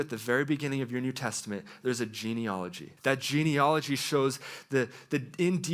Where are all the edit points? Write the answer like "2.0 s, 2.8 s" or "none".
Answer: 3.0 s